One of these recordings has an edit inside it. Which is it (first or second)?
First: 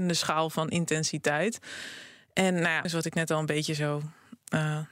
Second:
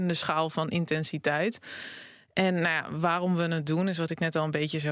first